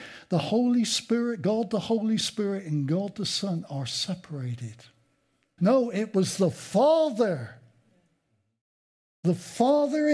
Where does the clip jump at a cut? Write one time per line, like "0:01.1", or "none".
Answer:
0:05.6